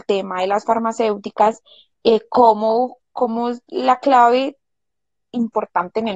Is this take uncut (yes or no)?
yes